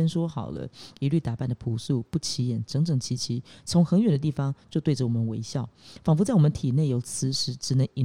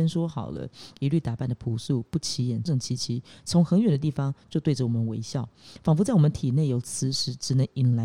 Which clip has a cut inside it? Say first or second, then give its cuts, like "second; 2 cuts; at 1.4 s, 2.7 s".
second; 1 cut; at 2.7 s